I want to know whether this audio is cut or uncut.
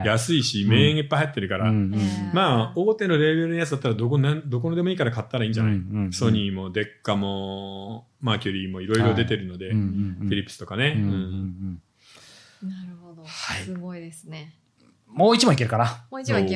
uncut